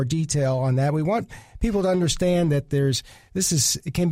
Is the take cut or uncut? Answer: uncut